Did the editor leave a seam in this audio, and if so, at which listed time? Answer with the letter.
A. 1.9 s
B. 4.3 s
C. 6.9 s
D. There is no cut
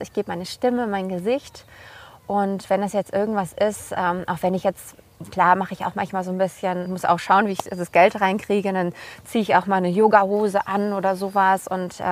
C